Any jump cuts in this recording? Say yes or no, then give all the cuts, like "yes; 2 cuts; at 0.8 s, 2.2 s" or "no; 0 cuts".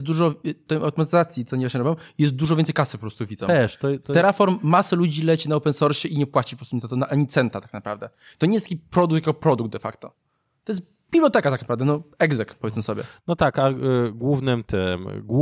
no; 0 cuts